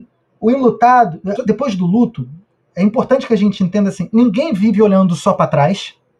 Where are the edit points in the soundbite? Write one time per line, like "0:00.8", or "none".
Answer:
0:01.4